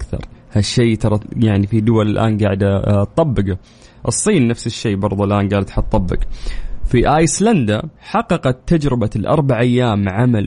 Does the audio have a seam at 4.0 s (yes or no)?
no